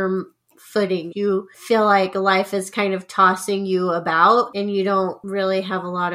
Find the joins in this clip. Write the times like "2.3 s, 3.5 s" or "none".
1.1 s